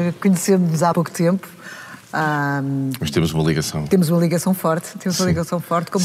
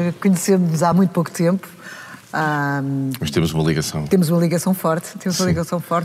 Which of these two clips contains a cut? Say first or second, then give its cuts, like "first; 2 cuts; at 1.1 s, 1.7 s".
first; 1 cut; at 0.9 s